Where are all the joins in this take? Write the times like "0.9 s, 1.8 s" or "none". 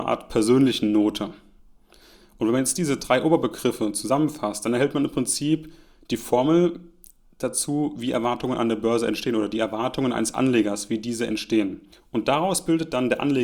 11.9 s